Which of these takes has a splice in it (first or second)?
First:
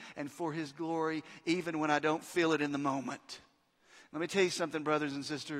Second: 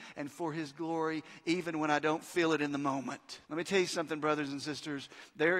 second